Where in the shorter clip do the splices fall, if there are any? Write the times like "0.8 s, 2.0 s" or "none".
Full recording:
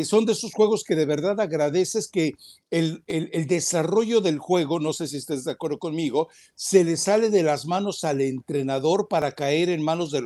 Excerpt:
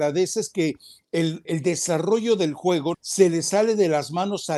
1.4 s, 2.9 s